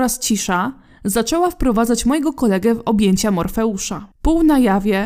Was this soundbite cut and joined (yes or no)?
yes